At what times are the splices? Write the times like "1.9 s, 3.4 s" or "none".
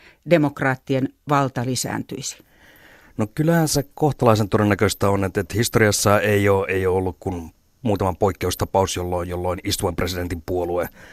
none